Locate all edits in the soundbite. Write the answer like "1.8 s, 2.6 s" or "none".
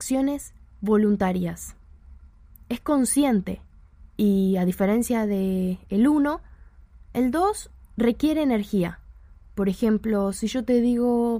none